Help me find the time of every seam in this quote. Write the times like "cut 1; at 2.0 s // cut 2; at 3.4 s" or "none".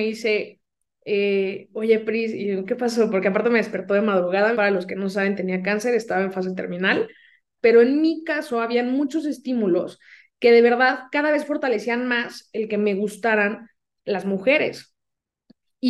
cut 1; at 4.5 s // cut 2; at 7.6 s